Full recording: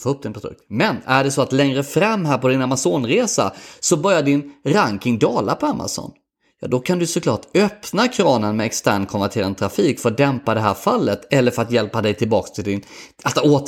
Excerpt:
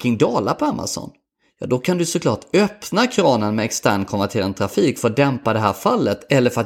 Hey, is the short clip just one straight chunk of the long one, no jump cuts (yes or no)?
yes